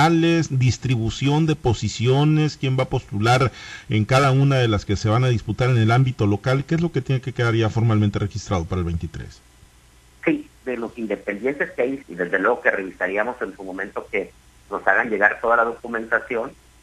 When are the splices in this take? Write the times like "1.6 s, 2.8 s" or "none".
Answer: 10.6 s, 12.0 s